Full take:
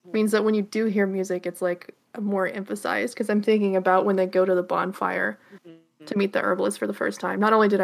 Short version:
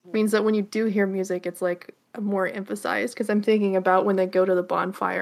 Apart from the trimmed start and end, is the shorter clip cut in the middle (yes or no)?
no